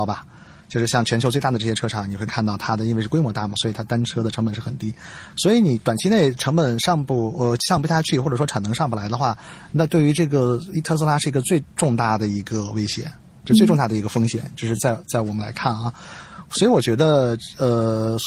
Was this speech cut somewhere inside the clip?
no; 0 cuts

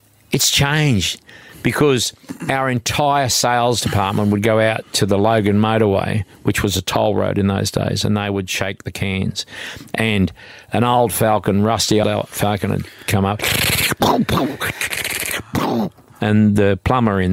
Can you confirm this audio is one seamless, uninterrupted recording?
no; 1 cut; at 12.0 s

